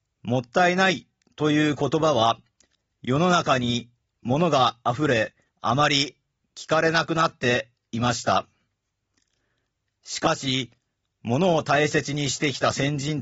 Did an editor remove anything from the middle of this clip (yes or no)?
yes